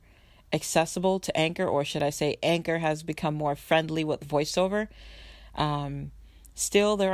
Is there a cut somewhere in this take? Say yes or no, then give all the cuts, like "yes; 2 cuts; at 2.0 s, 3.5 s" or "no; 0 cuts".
no; 0 cuts